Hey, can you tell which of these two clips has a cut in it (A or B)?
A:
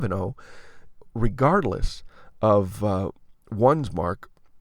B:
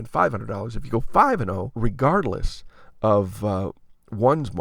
B